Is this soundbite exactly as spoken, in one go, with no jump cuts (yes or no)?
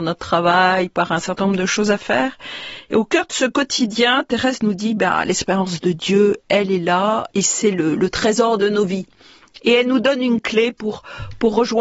no